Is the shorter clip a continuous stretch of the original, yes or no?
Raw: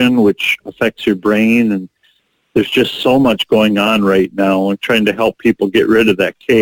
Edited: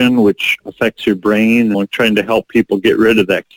no